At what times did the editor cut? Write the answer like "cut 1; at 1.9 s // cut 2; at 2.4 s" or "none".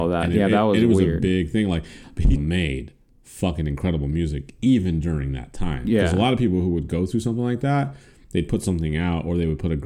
cut 1; at 2.4 s